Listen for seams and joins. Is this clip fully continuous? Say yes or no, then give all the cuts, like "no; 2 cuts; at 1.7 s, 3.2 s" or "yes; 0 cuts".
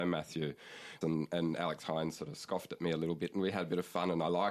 no; 1 cut; at 1.0 s